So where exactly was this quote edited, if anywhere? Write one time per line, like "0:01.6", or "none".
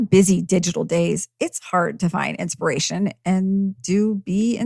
none